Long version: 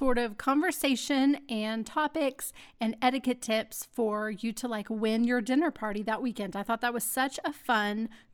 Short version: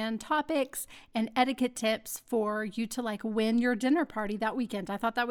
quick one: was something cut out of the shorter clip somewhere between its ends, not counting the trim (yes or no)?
no